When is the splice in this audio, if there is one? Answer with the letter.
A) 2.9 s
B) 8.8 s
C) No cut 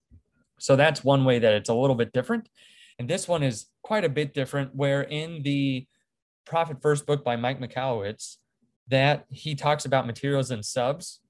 A